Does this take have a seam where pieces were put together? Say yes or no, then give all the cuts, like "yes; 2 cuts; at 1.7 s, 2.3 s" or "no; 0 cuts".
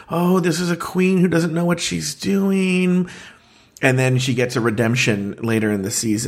no; 0 cuts